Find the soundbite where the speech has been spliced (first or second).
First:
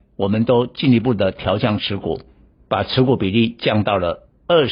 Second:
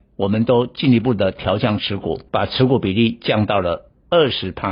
second